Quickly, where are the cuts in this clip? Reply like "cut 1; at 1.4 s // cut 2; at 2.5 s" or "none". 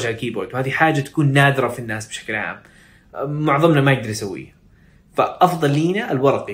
none